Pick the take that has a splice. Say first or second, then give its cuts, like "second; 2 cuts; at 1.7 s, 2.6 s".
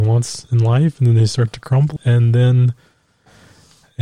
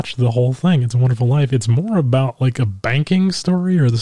first; 1 cut; at 2.0 s